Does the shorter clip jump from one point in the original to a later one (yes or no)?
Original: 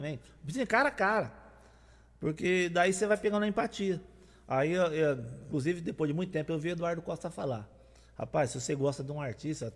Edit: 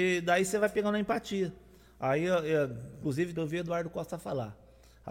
yes